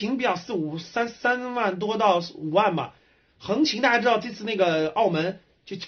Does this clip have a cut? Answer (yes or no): no